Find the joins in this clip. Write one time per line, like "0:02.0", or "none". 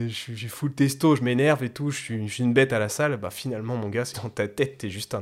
0:04.1